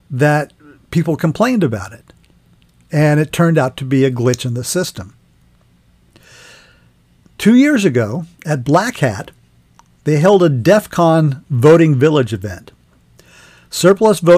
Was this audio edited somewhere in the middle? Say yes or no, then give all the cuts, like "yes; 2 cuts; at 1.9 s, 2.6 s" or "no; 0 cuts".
no; 0 cuts